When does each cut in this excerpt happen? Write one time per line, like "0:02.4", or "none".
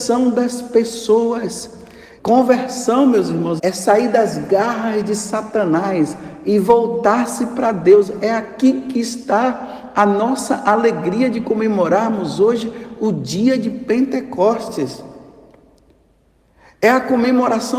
0:02.2
0:03.6

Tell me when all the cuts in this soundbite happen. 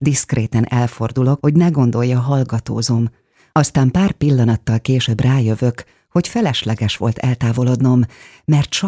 0:01.4

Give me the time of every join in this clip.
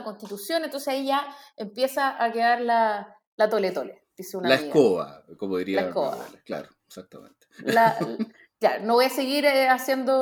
none

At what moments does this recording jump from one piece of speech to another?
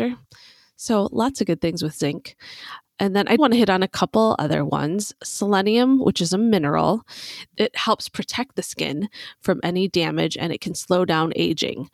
0:03.4

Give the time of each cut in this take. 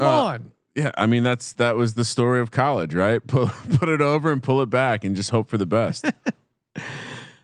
none

